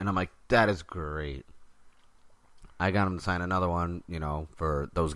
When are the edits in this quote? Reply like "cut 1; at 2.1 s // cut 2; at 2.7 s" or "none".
cut 1; at 2.7 s